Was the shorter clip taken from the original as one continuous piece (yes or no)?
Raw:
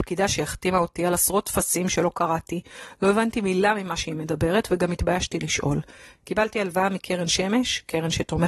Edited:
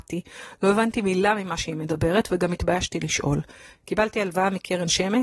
yes